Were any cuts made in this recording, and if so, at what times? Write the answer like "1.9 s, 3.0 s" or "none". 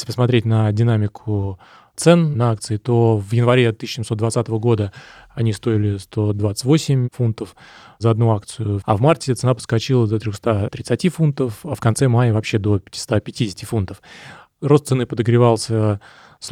8.8 s